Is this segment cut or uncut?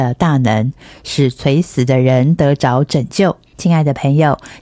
cut